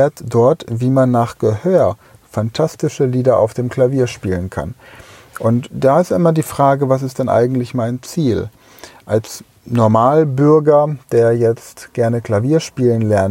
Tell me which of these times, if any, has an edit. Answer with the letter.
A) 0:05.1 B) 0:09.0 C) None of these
C